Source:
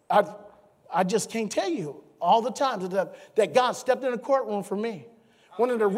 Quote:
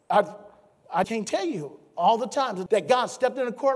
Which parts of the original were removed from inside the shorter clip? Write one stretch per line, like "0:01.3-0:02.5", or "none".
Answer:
0:01.0-0:01.3
0:02.9-0:03.3